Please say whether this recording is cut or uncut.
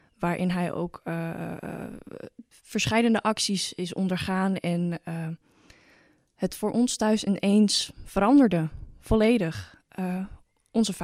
uncut